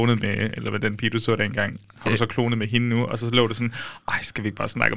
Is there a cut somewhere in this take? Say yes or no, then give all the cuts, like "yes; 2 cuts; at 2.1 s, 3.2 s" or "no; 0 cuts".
no; 0 cuts